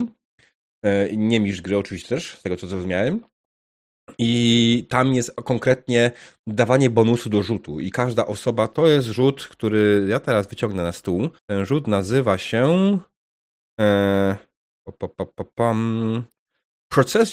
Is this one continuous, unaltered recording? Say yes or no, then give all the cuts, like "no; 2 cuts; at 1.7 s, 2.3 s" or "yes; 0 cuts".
no; 1 cut; at 11.4 s